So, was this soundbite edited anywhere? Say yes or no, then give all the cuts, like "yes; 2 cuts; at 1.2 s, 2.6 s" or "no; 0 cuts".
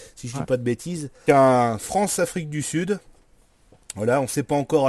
yes; 1 cut; at 1.3 s